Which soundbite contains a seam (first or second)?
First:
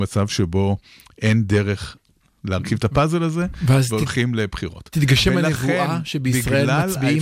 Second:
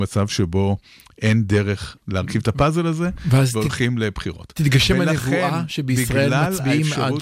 second